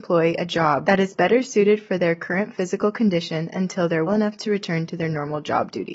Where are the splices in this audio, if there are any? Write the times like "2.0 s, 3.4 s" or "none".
4.1 s